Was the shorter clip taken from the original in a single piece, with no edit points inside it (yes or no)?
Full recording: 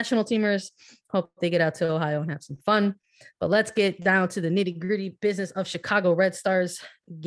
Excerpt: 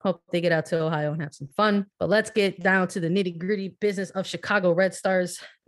no